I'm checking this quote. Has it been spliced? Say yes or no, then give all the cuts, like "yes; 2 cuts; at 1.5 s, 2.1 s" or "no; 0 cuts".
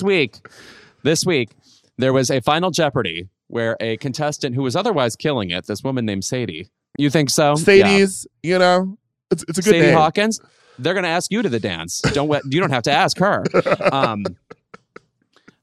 yes; 1 cut; at 7.0 s